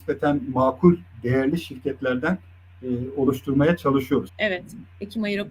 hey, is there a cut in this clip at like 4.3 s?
yes; 1 cut; at 4.3 s

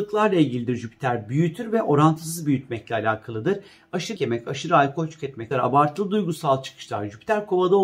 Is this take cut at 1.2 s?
no; 2 cuts; at 4.2 s, 5.5 s

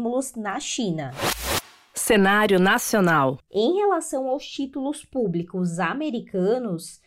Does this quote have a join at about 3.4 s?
yes; 1 cut; at 3.4 s

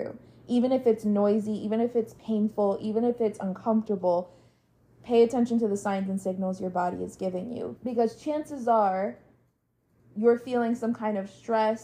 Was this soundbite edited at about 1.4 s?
no; 1 cut; at 7.8 s

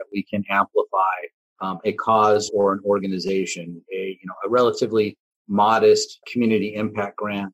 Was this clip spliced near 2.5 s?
yes; 2 cuts; at 2.5 s, 6.2 s

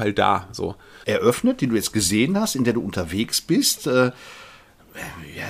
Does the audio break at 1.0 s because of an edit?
yes; 1 cut; at 1.0 s

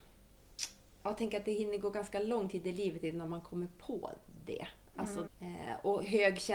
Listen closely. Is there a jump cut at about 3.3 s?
no; 1 cut; at 5.3 s

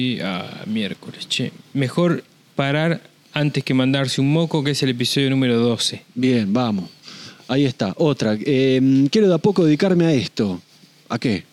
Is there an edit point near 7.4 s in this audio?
no; 0 cuts

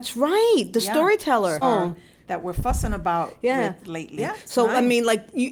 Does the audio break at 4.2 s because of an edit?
yes; 2 cuts; at 1.6 s, 4.2 s

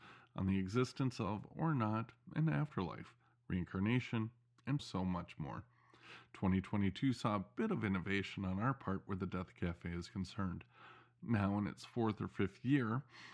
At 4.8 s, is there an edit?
yes; 1 cut; at 4.8 s

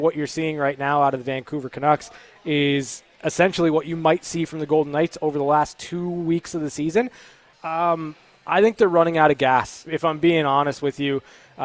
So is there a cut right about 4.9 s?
no; 2 cuts; at 7.5 s, 9.9 s

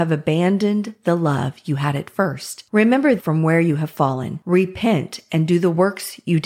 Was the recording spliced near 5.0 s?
no; 1 cut; at 3.2 s

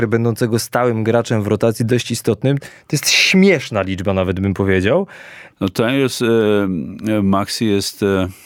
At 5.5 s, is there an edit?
yes; 2 cuts; at 2.6 s, 5.5 s

